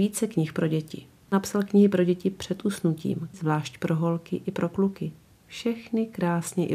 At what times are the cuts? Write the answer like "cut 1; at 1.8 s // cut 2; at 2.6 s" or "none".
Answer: cut 1; at 3.3 s